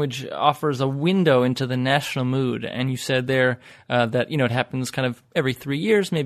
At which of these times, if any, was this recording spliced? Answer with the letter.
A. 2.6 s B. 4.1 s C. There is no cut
C